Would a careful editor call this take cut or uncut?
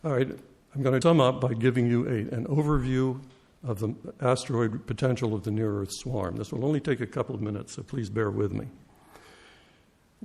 cut